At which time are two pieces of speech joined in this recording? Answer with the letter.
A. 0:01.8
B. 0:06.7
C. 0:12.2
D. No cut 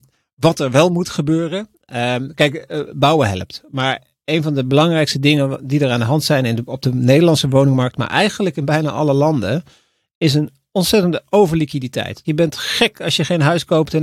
C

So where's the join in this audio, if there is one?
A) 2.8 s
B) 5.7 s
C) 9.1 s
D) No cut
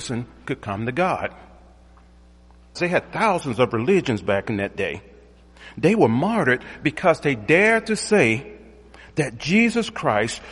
A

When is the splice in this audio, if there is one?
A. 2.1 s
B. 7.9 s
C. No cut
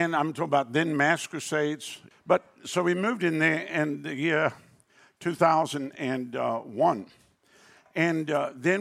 A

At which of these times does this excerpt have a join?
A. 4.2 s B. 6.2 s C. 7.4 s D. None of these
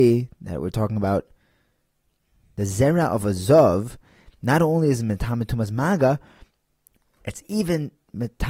D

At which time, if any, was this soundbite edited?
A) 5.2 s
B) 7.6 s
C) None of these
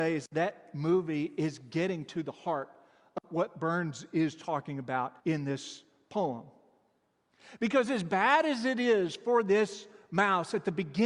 A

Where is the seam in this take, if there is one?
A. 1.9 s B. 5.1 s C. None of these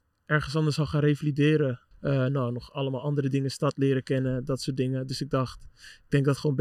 A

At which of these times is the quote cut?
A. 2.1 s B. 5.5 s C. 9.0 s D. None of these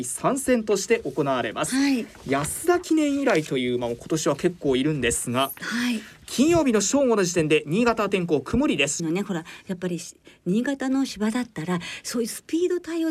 C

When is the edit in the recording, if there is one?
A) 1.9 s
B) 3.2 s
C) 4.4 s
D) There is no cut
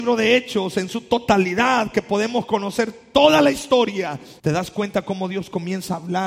C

